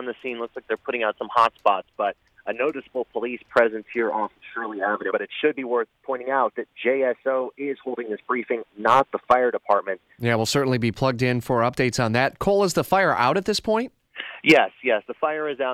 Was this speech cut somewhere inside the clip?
yes; 2 cuts; at 5.1 s, 10.2 s

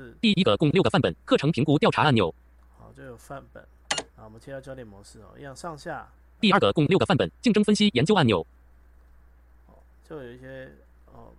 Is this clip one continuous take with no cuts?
no; 2 cuts; at 4.1 s, 6.4 s

